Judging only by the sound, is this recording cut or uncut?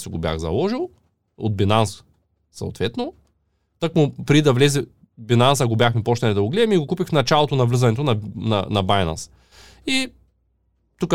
uncut